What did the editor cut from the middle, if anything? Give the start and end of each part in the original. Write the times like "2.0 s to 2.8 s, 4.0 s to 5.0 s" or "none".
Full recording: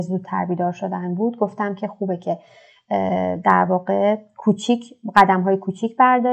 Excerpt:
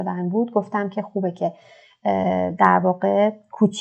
none